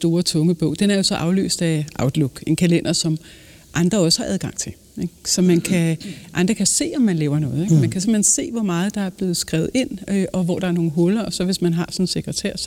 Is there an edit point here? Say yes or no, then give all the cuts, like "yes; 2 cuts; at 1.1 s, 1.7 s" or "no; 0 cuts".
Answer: no; 0 cuts